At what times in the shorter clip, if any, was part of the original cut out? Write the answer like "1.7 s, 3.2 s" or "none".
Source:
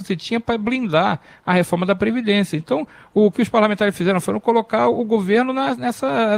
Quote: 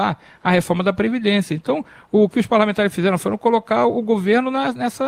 none